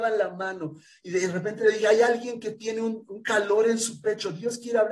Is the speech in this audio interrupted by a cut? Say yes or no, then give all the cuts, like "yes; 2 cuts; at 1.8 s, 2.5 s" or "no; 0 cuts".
no; 0 cuts